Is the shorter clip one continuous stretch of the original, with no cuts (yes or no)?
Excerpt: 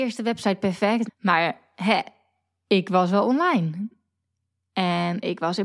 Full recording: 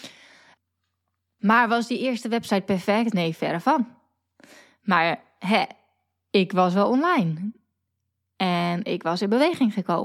no